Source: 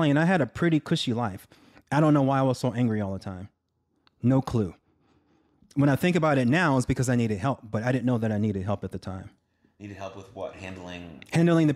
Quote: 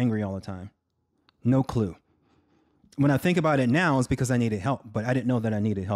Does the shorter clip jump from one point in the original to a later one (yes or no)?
no